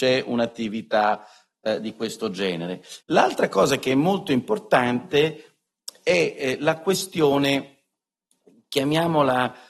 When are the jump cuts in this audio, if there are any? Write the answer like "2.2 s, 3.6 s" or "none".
3.0 s